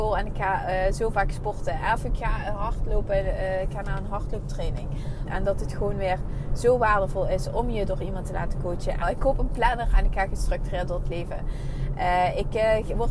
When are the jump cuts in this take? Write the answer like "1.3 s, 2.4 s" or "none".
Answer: 5.3 s, 9.0 s